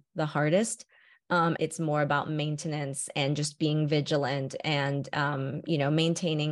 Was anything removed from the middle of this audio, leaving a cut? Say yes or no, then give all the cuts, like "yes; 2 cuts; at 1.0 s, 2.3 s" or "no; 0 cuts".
yes; 1 cut; at 1.6 s